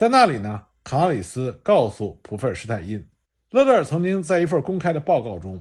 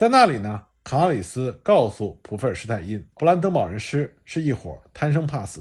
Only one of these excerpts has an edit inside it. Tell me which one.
second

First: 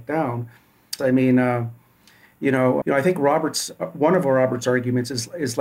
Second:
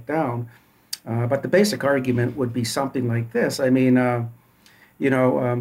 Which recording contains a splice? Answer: first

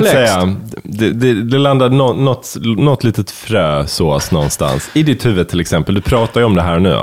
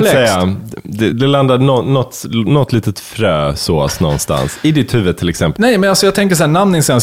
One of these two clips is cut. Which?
second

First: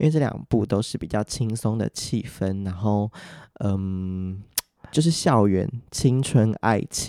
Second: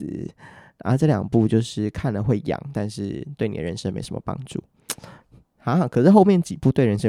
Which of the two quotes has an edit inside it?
first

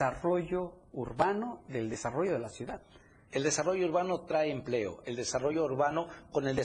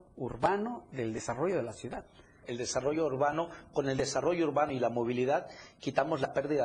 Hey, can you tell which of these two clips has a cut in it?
second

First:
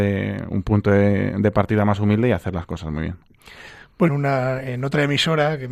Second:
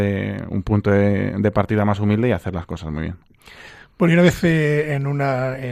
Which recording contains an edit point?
first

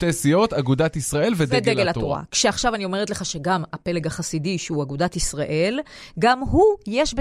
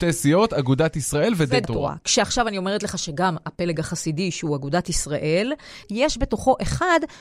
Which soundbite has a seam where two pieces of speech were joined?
second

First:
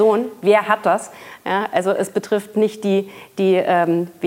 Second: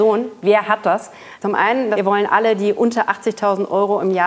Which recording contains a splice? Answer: second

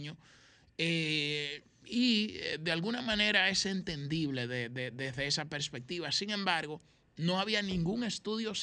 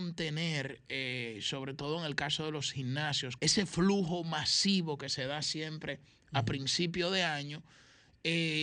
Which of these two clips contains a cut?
second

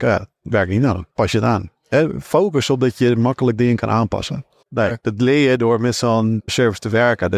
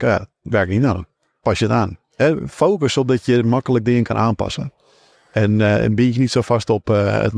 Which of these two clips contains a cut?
first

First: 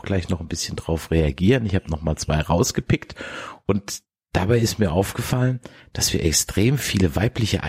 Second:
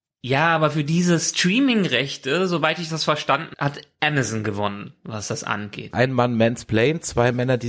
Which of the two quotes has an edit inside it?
second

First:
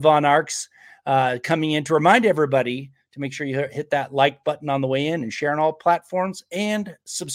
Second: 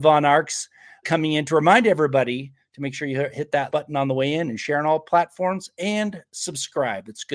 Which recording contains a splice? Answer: second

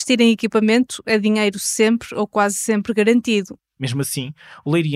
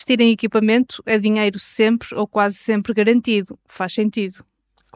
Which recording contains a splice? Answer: first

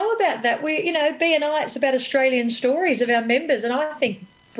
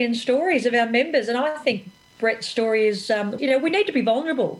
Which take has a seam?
second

